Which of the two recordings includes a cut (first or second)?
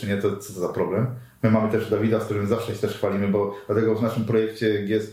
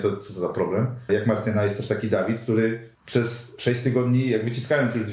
second